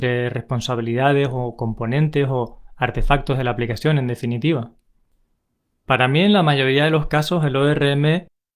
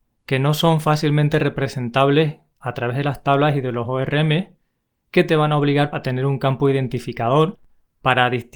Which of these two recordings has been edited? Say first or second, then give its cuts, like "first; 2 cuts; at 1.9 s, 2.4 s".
second; 1 cut; at 5.9 s